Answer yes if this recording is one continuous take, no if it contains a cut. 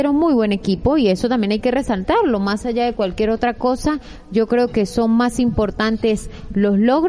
yes